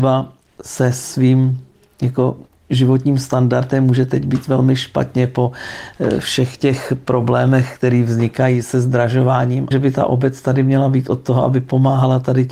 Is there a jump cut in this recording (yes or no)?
yes